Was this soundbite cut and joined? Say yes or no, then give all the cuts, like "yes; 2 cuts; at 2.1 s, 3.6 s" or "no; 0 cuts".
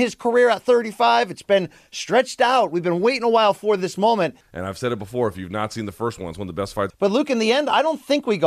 yes; 2 cuts; at 4.4 s, 6.9 s